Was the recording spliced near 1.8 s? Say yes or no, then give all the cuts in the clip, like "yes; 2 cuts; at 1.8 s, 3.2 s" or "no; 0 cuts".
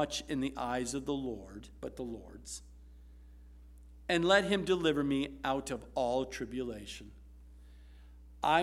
yes; 1 cut; at 1.8 s